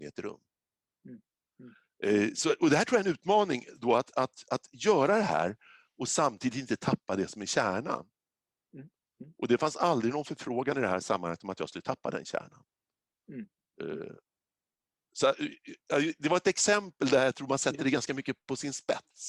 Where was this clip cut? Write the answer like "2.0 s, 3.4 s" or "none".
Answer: none